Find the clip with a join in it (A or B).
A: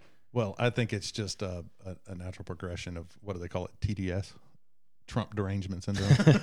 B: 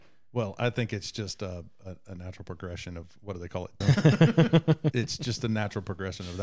B